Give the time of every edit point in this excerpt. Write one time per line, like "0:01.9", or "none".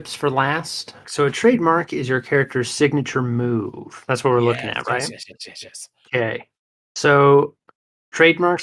0:01.0

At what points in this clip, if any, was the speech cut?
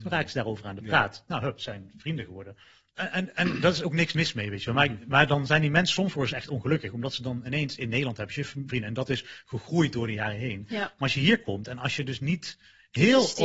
0:03.0
0:08.7

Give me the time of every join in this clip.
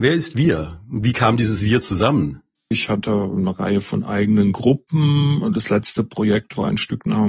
0:02.7

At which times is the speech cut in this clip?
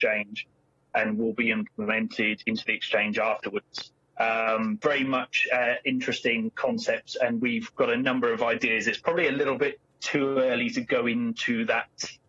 0:04.8

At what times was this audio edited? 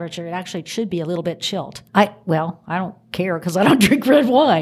0:01.9

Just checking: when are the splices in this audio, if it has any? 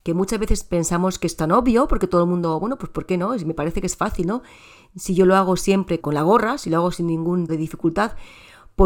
0:06.0
0:07.5

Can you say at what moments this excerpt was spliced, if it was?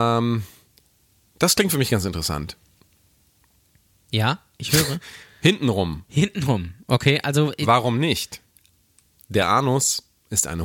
none

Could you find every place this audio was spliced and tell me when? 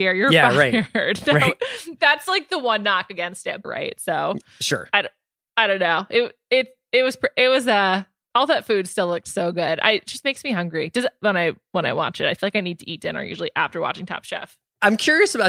0:03.6

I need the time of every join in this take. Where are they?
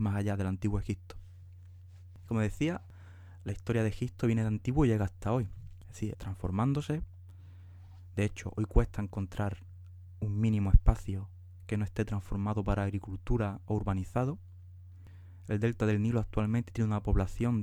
0:06.1

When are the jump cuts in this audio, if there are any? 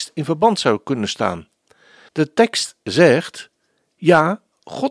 0:02.1

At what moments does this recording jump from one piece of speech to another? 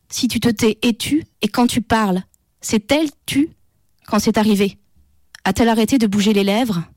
0:01.3

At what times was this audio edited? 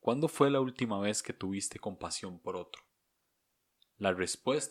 none

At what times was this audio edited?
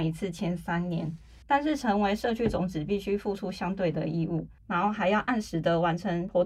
0:01.4
0:04.6

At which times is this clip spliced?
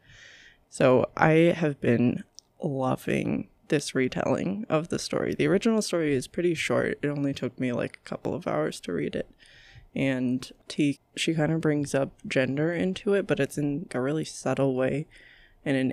0:11.0
0:13.9

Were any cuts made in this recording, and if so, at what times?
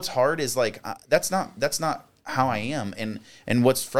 0:01.0

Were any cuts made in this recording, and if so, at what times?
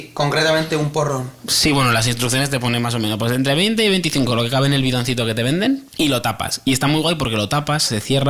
0:05.9

